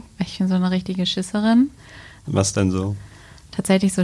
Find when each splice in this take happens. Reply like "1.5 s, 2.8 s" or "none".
2.2 s